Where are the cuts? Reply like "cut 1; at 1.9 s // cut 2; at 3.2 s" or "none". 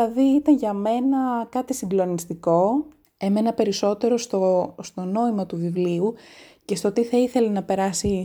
cut 1; at 3.0 s